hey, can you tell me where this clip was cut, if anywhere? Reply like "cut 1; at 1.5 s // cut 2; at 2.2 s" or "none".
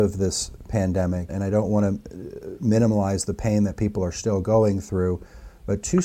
cut 1; at 1.3 s